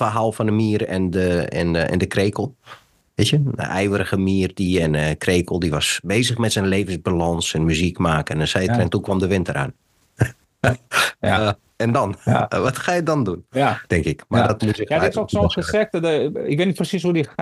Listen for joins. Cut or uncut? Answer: cut